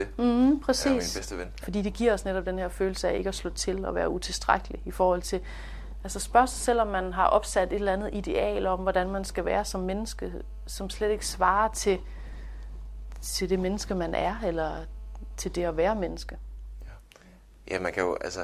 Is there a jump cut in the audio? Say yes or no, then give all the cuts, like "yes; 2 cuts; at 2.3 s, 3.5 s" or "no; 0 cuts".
yes; 1 cut; at 1.6 s